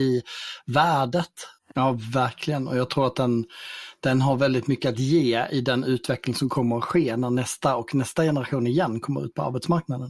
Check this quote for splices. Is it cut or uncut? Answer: cut